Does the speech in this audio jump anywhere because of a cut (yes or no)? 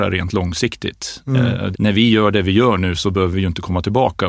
yes